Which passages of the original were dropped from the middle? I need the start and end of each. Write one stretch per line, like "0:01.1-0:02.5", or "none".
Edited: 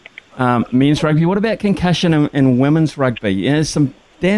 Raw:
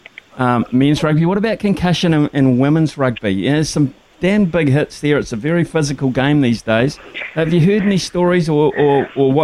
none